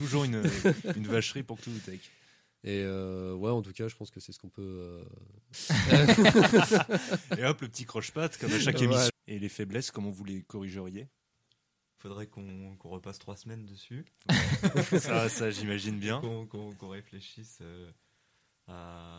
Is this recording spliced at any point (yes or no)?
yes